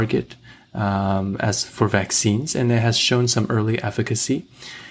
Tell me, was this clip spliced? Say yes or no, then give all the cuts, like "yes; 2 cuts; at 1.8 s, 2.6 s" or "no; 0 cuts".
no; 0 cuts